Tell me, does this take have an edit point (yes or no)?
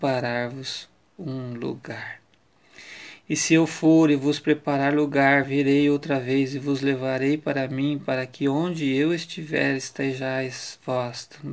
no